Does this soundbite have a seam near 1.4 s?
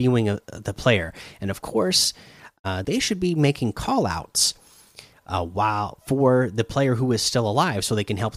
no; 1 cut; at 2.8 s

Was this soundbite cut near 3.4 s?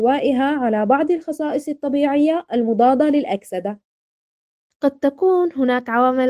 no; 1 cut; at 4.7 s

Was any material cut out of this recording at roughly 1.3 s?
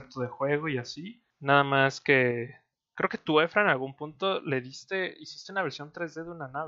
yes; 1 cut; at 1.3 s

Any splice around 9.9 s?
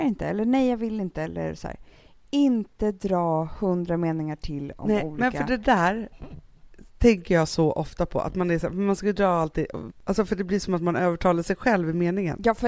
yes; 1 cut; at 9.9 s

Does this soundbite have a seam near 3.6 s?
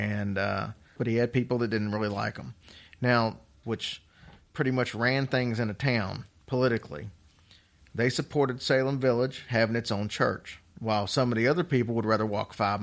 yes; 2 cuts; at 1.0 s, 3.6 s

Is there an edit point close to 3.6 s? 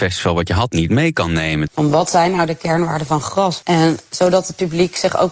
yes; 2 cuts; at 1.7 s, 3.6 s

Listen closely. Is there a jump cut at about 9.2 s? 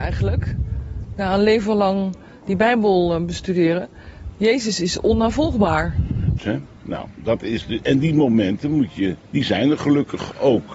yes; 2 cuts; at 6.4 s, 9.2 s

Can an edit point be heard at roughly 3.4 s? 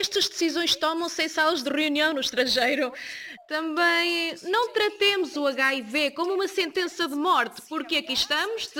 yes; 1 cut; at 3.4 s

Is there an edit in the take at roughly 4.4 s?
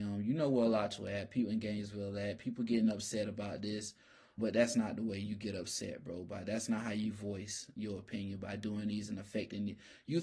yes; 1 cut; at 4.4 s

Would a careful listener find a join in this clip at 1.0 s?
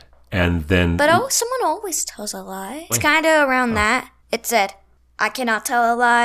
no; 2 cuts; at 2.9 s, 4.2 s

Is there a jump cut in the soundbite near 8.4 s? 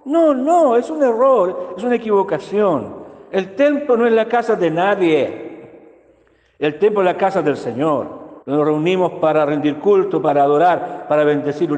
yes; 1 cut; at 8.4 s

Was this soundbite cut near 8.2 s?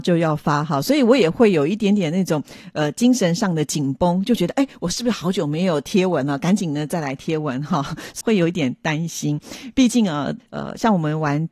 yes; 2 cuts; at 8.2 s, 10.4 s

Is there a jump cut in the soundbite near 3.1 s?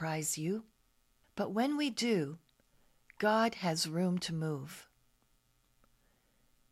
no; 1 cut; at 1.2 s

